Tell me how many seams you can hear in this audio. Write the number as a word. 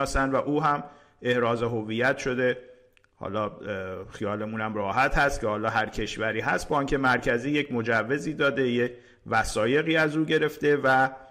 zero